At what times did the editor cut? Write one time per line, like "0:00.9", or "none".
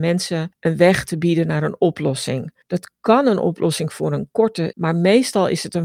0:04.7